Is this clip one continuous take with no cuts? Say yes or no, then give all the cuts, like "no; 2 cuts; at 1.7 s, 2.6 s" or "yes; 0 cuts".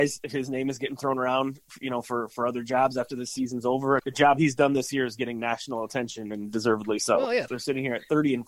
no; 2 cuts; at 4.0 s, 7.5 s